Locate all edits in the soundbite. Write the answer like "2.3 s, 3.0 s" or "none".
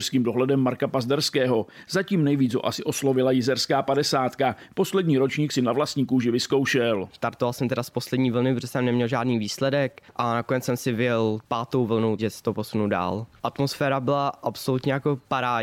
12.2 s

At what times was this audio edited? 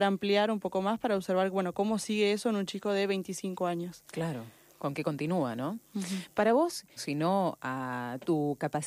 7.0 s

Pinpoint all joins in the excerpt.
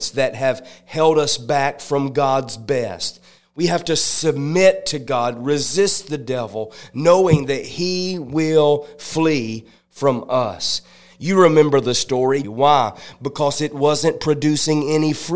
12.4 s

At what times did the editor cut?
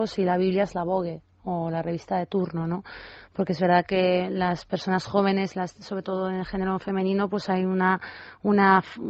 none

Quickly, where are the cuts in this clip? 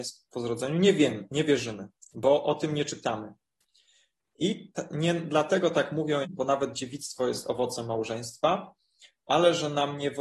6.2 s

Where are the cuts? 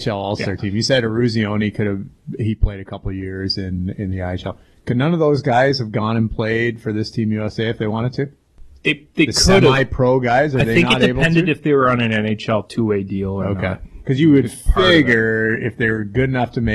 none

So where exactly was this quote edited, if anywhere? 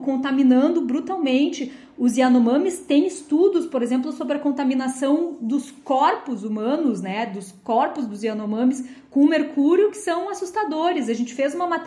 none

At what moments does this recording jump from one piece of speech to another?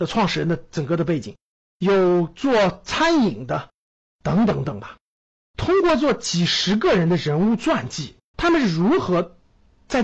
4.6 s, 8.3 s

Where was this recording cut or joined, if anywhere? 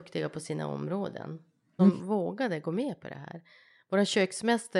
1.8 s

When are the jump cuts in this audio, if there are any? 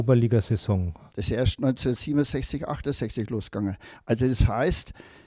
1.1 s

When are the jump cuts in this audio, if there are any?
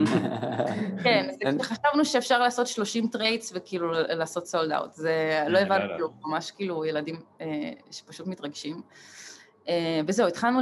none

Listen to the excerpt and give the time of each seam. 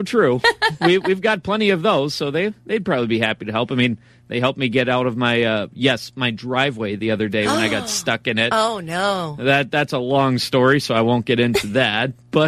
none

